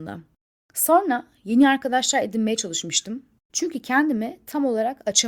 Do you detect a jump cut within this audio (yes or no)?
yes